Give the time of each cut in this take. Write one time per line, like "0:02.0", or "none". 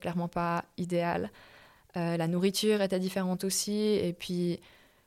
0:01.8